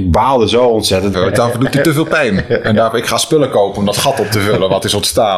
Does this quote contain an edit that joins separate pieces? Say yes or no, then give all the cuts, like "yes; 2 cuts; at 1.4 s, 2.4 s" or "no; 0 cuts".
yes; 1 cut; at 1.1 s